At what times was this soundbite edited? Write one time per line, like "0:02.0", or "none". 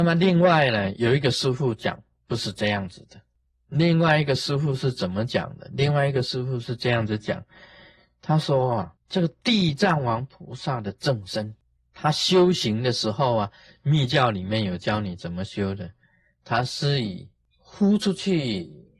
none